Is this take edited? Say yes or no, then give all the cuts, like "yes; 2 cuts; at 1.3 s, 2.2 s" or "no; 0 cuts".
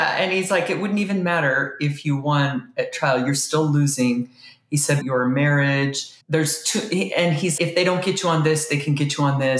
yes; 3 cuts; at 5.0 s, 6.2 s, 7.6 s